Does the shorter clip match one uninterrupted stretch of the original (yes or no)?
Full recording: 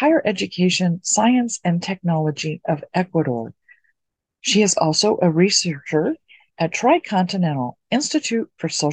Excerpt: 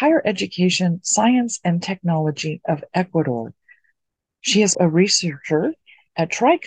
no